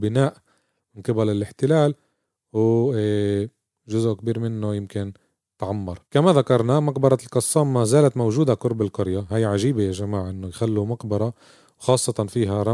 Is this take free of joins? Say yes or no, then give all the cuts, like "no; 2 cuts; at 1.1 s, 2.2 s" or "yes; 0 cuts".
no; 1 cut; at 6.0 s